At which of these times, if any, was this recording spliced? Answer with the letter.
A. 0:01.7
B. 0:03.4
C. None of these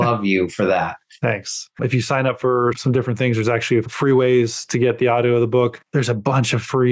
A